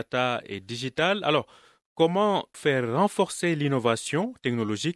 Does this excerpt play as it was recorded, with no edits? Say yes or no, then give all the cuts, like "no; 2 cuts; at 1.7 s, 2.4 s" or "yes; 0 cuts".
no; 1 cut; at 2.5 s